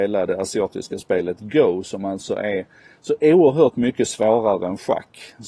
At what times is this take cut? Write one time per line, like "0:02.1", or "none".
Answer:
none